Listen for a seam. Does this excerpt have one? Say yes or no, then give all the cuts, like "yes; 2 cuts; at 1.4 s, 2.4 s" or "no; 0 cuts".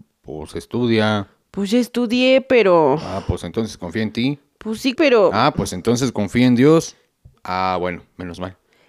yes; 2 cuts; at 5.0 s, 7.4 s